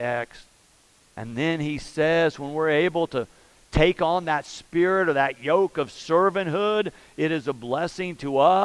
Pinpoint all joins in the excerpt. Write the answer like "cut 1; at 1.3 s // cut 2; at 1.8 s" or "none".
none